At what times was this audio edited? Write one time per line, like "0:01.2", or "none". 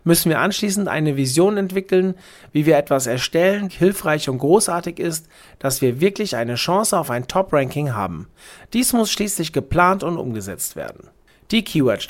0:03.7